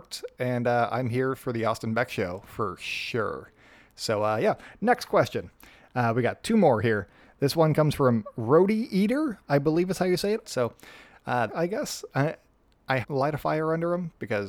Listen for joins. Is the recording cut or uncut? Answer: cut